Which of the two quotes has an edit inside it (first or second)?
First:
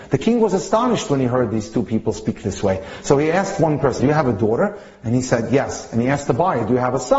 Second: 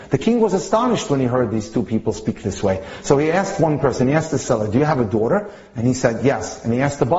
first